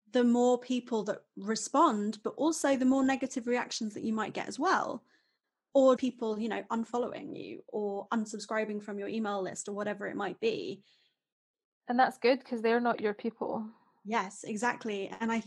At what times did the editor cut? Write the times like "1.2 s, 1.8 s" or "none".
6.0 s